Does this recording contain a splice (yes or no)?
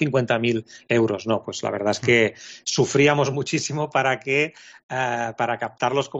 no